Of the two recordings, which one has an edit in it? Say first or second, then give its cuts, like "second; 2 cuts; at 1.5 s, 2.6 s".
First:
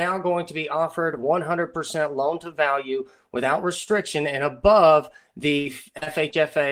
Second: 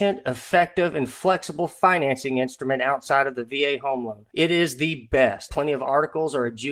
second; 2 cuts; at 4.3 s, 5.5 s